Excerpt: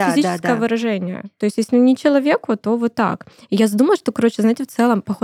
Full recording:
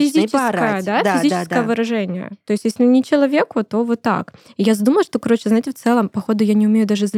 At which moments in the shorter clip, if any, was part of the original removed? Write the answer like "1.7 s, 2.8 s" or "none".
none